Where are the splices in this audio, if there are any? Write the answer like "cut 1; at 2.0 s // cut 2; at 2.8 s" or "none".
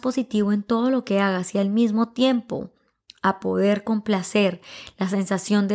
none